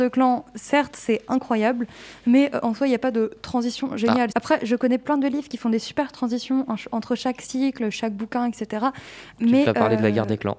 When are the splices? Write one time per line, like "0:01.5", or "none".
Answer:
0:04.3